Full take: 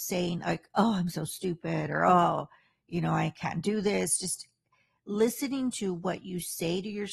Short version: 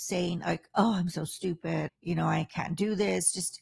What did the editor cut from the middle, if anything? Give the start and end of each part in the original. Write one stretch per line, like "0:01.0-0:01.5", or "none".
0:01.9-0:02.7